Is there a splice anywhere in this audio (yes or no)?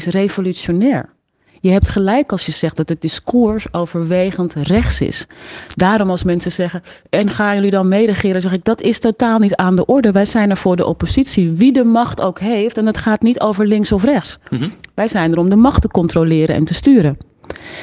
no